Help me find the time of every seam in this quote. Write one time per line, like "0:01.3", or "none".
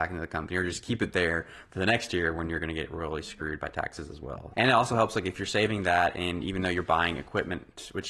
0:04.5